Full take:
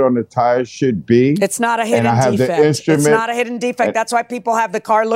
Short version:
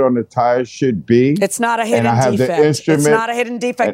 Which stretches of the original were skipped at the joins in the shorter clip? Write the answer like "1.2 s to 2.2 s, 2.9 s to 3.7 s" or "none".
none